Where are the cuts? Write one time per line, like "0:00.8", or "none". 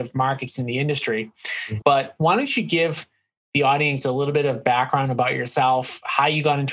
0:01.8